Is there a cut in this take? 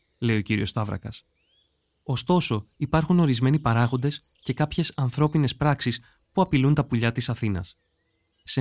no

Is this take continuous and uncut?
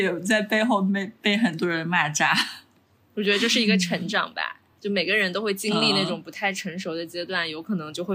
yes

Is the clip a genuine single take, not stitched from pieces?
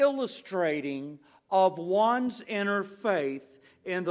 yes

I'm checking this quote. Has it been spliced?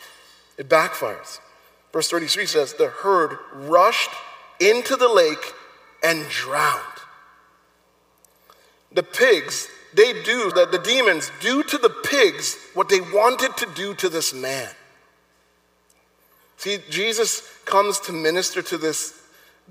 yes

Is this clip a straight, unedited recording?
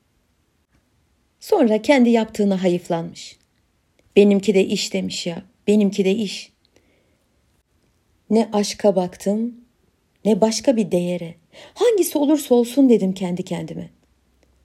yes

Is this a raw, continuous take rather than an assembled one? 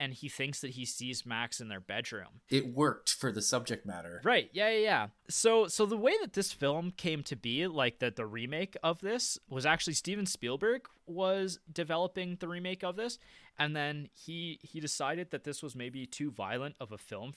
no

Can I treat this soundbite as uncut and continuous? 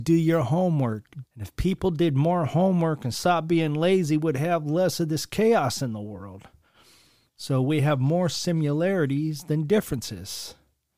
no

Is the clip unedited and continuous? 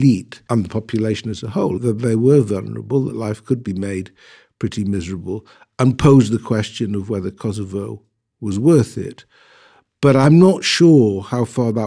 yes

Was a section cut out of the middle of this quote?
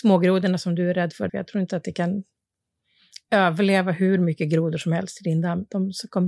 yes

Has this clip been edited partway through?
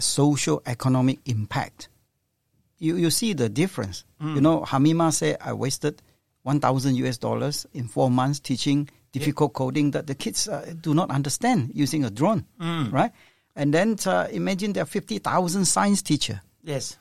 no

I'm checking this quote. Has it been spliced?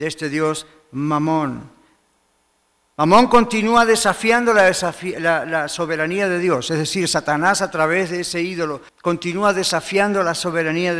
yes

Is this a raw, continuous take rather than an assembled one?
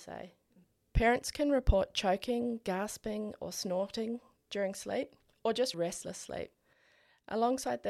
no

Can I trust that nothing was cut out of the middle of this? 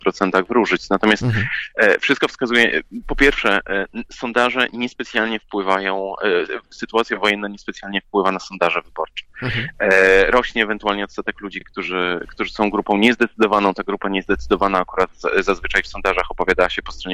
yes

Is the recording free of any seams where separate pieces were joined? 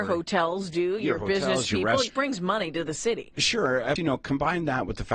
no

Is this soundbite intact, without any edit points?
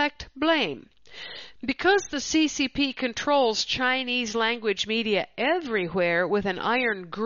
yes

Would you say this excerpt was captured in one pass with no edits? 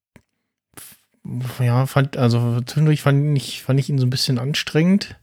yes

